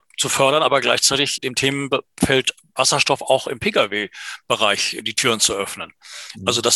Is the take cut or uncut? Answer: cut